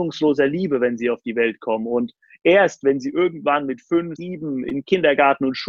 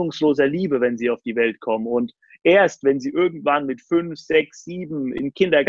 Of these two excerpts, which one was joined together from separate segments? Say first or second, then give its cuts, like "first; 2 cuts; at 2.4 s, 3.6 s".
first; 1 cut; at 4.2 s